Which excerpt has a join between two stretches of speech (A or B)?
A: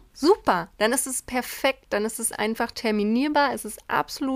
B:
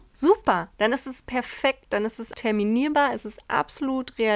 B